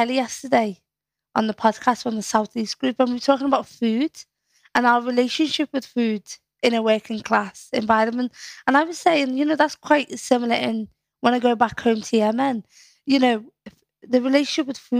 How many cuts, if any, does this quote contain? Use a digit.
0